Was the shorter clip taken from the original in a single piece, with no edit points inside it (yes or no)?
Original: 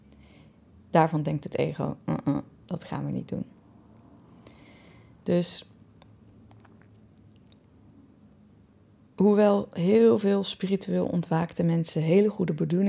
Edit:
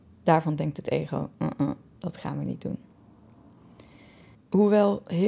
no